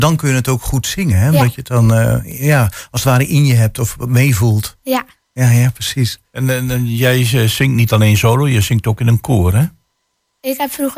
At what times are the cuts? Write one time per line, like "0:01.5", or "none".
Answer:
none